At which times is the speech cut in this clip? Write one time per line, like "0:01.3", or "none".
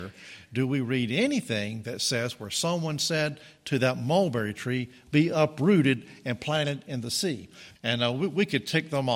0:07.7